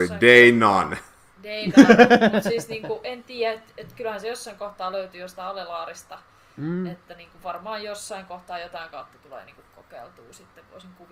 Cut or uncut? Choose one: uncut